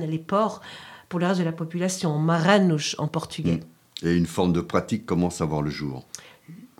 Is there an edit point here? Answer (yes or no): no